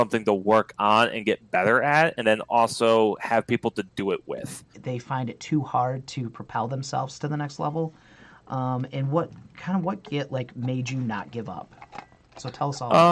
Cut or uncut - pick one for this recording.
cut